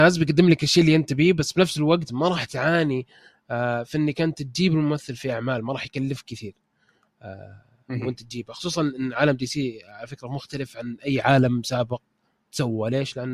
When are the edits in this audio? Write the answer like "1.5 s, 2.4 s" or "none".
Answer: 9.1 s